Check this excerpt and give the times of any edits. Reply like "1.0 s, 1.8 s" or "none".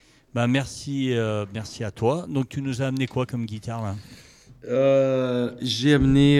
none